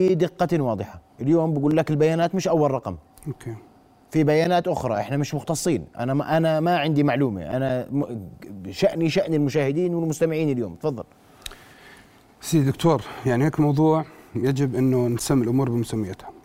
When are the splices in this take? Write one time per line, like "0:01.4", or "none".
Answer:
0:01.1